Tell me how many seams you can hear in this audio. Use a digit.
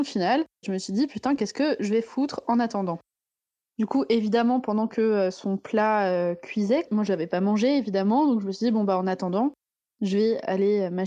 0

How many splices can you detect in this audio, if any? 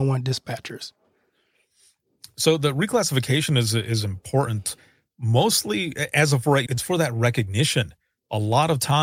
1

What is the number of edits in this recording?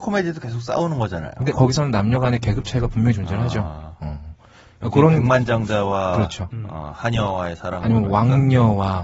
0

